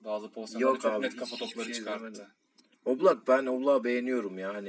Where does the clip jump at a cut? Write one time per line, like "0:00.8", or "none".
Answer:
none